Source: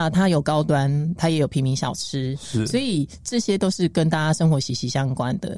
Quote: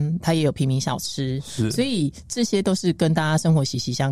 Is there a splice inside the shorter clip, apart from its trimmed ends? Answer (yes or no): no